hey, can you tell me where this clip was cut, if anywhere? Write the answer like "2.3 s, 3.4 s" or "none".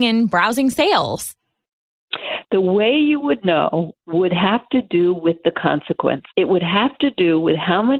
6.3 s